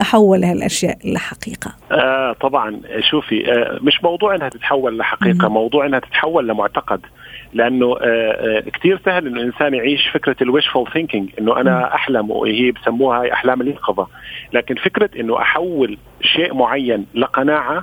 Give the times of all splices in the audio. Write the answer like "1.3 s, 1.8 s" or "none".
1.8 s

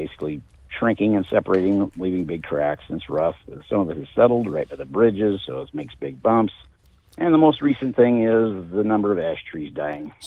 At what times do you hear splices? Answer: none

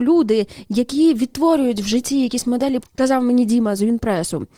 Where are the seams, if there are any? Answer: 2.8 s

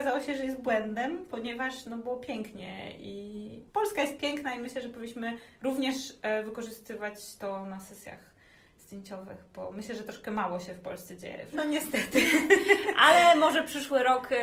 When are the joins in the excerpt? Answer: 3.7 s, 11.5 s

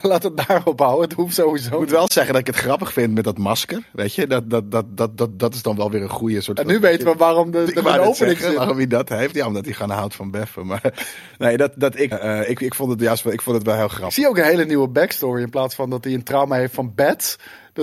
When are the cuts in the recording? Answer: 12.1 s

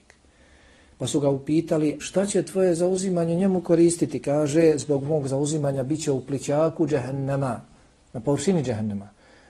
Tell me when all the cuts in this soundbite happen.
2.0 s

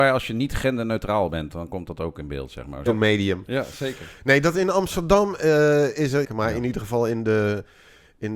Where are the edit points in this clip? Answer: 2.9 s, 6.2 s

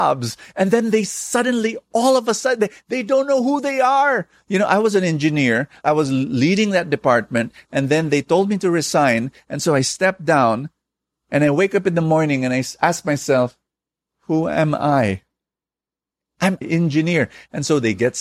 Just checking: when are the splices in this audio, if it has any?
16.6 s

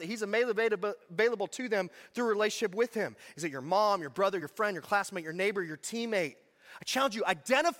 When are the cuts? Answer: none

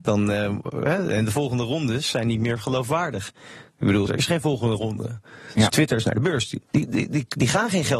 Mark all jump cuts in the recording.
4.1 s, 5.7 s

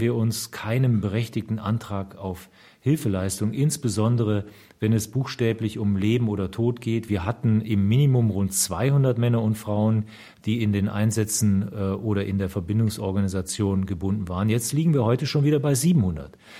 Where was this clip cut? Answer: 7.1 s

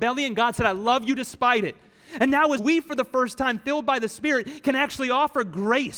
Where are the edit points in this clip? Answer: 2.6 s

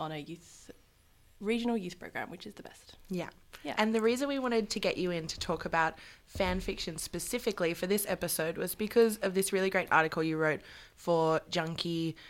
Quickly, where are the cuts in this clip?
none

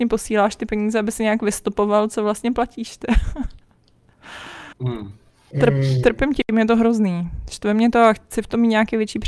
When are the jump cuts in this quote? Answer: 4.7 s

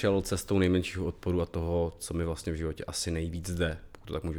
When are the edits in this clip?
none

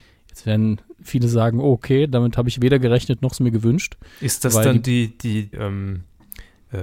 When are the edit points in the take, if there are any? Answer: 5.5 s

